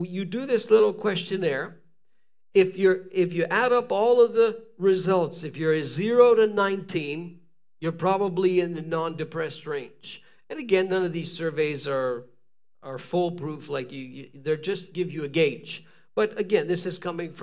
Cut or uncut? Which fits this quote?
uncut